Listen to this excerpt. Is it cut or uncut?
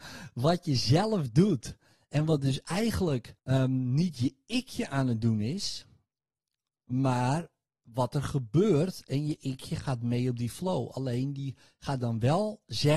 cut